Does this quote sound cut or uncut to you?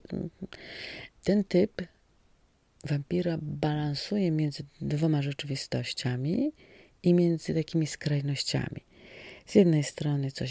cut